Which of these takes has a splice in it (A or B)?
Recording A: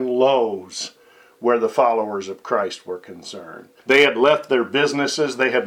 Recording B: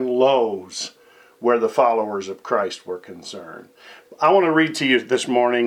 A